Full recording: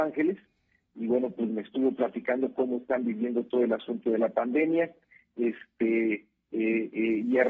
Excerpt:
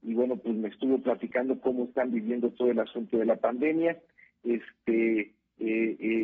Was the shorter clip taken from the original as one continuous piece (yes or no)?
yes